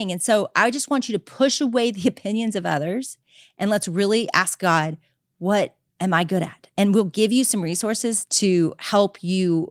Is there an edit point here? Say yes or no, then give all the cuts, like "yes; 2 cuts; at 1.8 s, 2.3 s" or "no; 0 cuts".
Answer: no; 0 cuts